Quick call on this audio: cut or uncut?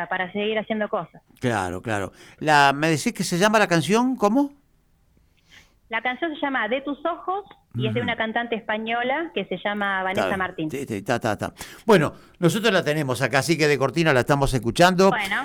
uncut